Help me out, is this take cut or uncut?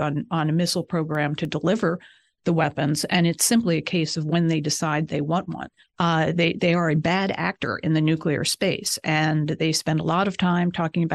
cut